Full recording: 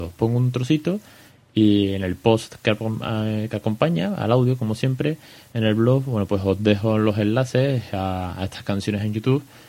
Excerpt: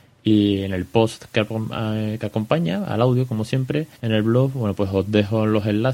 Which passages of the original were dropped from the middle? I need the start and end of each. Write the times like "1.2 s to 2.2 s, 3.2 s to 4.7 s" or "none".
5.3 s to 5.5 s